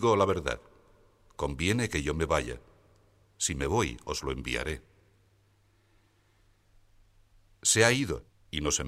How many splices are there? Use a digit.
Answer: 1